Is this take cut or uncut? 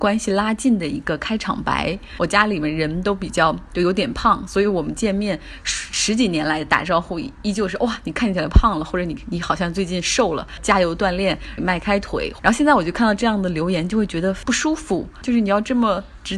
cut